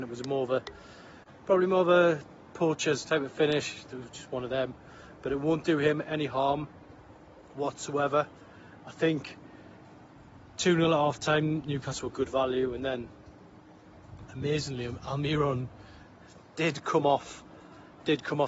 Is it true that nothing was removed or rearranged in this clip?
no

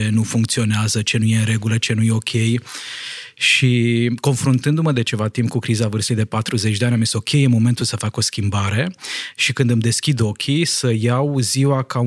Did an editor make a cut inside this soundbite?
no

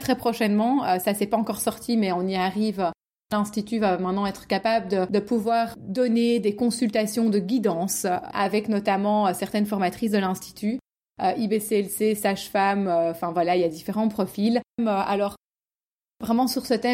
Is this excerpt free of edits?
no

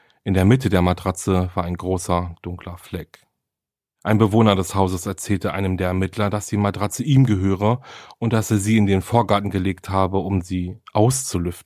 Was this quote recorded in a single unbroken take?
yes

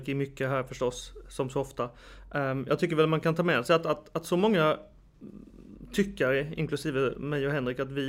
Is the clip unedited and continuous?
yes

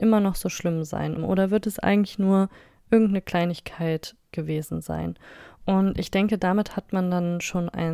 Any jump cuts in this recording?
yes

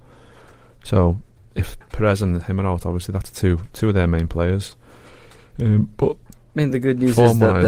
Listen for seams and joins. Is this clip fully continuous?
yes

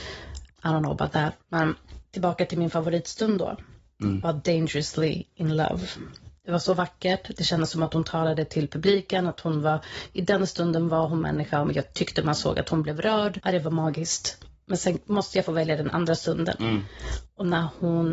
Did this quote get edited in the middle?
yes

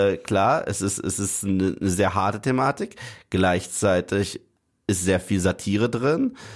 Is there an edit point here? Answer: no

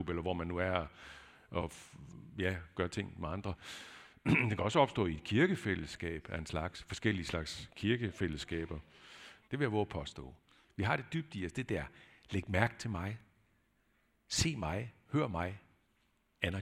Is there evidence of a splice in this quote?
yes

